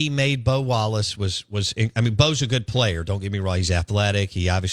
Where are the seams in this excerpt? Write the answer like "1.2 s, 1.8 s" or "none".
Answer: none